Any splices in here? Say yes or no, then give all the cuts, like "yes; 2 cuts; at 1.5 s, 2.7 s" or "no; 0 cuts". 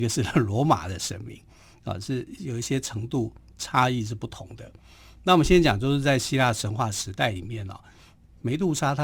no; 0 cuts